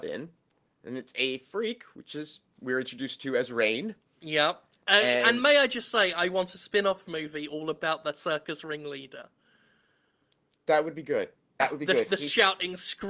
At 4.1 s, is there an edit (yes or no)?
no